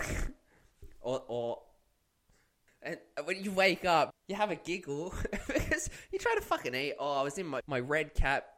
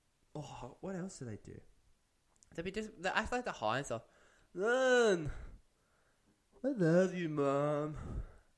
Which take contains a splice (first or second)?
first